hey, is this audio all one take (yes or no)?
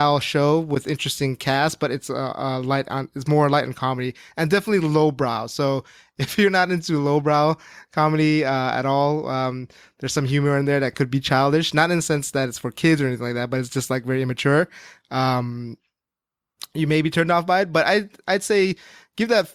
yes